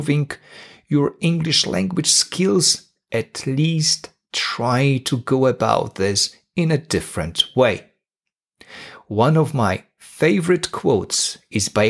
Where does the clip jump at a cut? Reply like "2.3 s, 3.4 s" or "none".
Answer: none